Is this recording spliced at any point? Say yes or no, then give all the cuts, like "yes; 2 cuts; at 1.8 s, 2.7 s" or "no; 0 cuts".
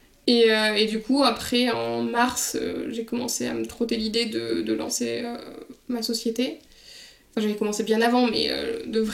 no; 0 cuts